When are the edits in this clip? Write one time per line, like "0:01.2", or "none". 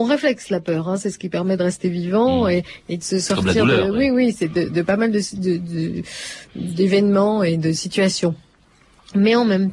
none